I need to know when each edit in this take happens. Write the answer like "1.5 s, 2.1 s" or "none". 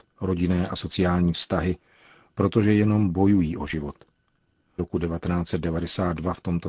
4.8 s